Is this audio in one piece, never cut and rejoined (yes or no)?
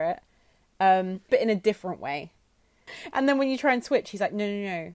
no